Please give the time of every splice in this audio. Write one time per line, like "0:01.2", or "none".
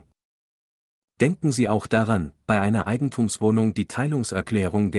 0:01.0